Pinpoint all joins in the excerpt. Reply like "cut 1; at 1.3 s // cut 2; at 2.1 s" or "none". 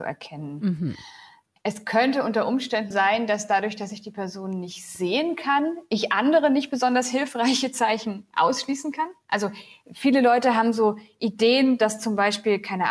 cut 1; at 2.9 s